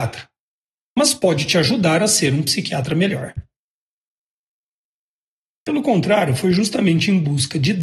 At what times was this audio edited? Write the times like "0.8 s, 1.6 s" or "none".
5.5 s